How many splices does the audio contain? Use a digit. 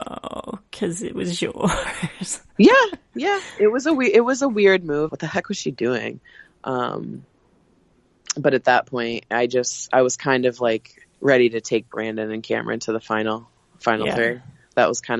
2